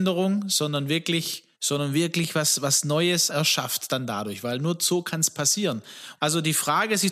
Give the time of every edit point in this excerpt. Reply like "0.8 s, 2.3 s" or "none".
1.5 s, 3.3 s, 6.2 s